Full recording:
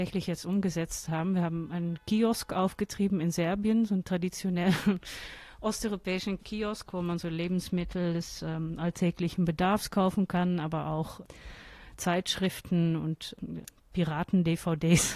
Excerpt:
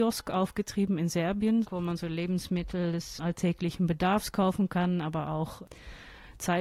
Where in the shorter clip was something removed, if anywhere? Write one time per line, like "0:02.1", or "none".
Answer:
0:01.6
0:03.2